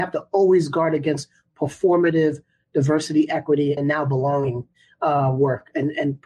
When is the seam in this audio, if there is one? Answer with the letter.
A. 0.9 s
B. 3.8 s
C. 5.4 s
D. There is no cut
B